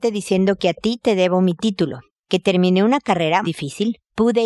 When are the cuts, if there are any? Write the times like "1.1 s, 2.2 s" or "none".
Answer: 3.4 s